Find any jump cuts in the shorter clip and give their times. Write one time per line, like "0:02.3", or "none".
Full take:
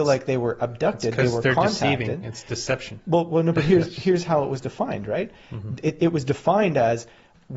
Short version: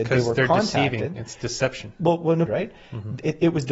0:02.5

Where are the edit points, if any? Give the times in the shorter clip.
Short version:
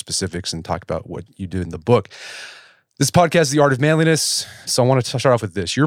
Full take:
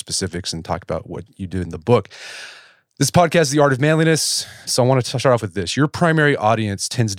none

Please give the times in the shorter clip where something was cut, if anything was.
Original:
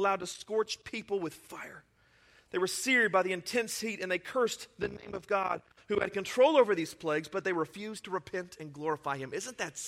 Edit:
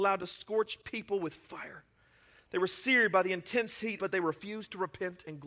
0:04.0

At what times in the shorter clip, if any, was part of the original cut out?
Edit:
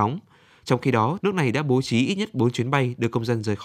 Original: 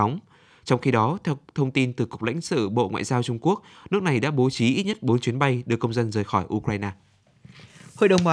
0:01.2

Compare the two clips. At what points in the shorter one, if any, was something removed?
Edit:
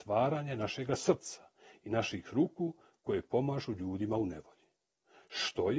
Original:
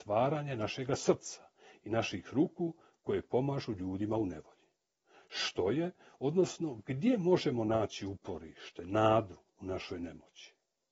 none

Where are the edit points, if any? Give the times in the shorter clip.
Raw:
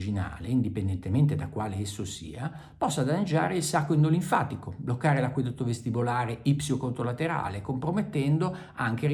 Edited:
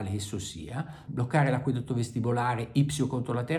0:01.1

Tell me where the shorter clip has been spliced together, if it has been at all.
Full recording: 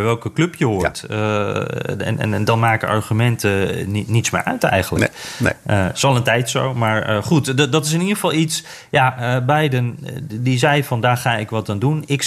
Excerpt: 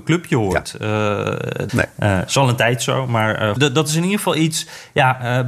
0:01.7
0:03.6

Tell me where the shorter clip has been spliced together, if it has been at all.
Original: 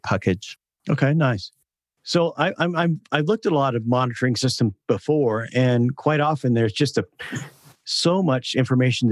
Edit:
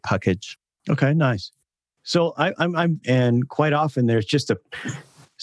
0:03.0

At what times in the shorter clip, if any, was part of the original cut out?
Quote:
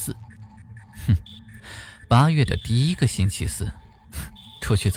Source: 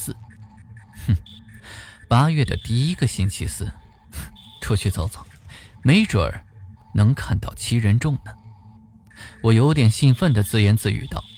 none

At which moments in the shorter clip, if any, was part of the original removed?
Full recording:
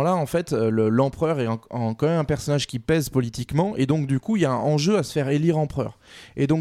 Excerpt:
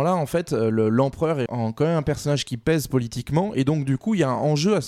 0:01.5

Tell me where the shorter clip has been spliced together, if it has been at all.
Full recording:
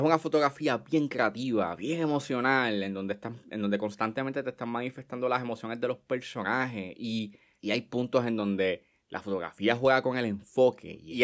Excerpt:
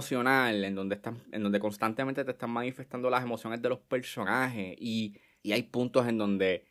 none

